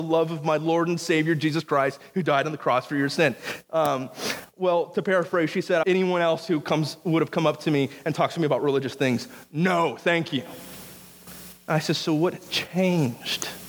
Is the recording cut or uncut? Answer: cut